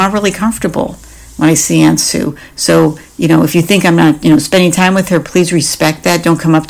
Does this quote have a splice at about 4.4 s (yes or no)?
no